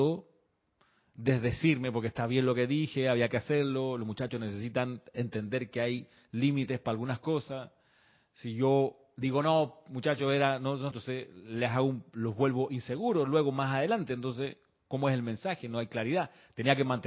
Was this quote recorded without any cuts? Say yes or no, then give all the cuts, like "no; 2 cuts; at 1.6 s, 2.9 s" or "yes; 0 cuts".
no; 1 cut; at 10.9 s